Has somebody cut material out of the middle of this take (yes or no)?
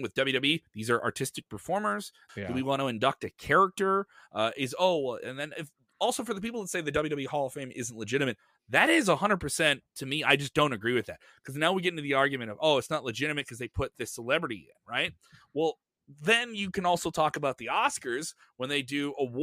yes